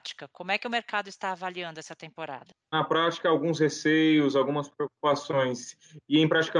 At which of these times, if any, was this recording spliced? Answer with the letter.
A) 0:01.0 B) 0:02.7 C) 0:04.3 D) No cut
B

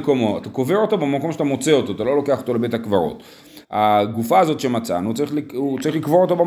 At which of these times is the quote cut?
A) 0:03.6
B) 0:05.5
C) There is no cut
A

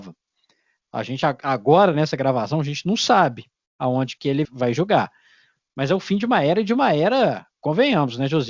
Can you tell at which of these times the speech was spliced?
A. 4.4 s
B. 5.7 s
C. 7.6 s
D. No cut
A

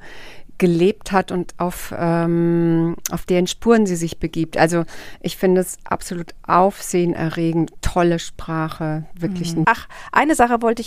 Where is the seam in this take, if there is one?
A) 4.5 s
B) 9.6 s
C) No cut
B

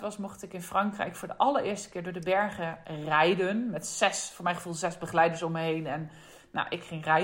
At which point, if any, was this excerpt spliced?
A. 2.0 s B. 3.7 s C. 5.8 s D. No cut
D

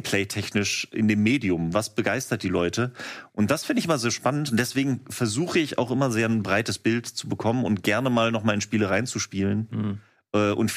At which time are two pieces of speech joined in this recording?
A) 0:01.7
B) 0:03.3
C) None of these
A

